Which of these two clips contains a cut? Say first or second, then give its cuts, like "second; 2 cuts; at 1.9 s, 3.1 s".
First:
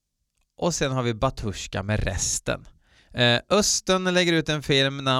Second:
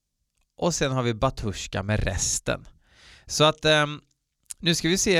first; 1 cut; at 3.0 s